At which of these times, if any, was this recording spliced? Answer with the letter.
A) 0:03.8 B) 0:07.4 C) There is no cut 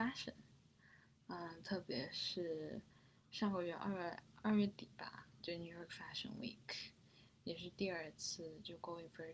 C